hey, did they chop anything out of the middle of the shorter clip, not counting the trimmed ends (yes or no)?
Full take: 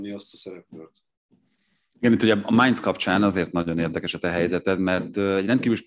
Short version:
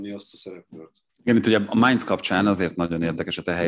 yes